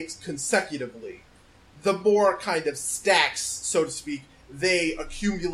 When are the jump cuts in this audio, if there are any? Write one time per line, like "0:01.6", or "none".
none